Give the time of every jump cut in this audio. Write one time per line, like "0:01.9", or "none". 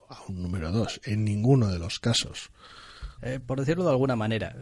0:03.2